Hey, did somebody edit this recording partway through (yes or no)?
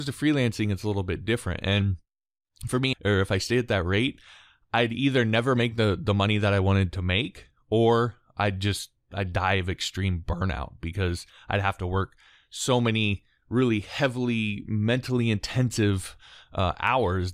yes